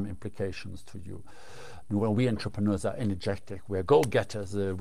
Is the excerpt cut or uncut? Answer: cut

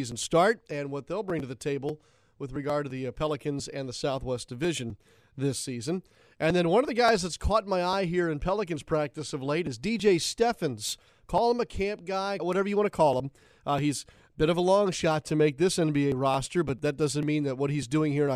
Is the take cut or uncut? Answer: cut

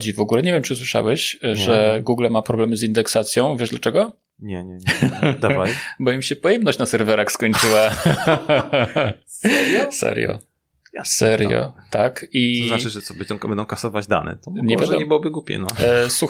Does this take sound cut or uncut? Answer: uncut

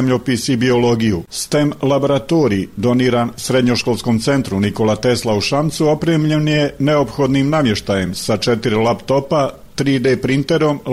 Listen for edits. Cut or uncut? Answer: cut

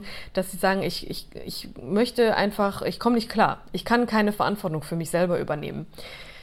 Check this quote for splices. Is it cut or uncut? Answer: uncut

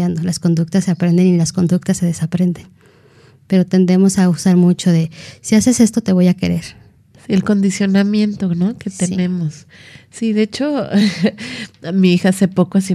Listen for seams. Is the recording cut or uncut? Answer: cut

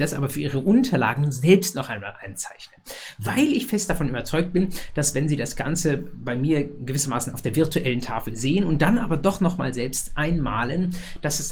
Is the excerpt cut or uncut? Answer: uncut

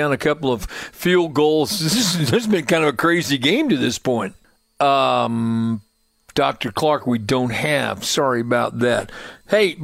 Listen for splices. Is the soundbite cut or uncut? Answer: uncut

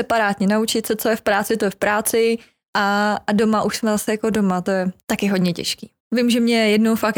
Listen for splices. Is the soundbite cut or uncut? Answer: cut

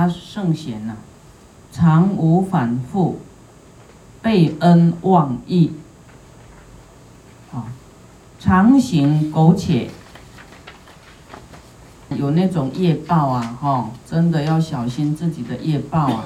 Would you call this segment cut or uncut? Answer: cut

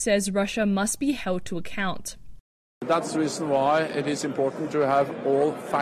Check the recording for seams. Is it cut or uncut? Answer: uncut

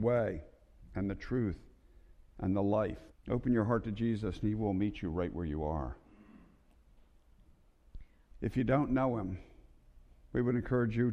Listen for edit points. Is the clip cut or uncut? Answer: cut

